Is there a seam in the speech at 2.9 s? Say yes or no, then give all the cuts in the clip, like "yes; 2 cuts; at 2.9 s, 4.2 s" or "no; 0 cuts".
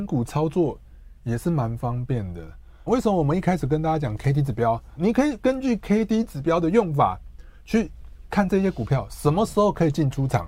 yes; 2 cuts; at 2.9 s, 5.0 s